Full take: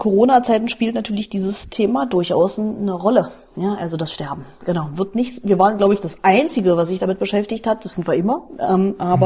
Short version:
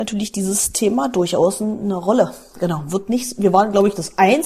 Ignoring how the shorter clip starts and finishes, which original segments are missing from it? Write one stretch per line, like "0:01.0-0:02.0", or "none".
0:03.5-0:04.6

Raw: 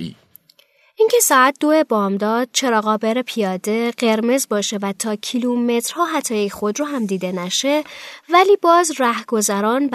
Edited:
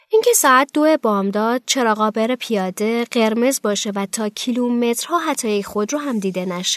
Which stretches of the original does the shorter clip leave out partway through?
none

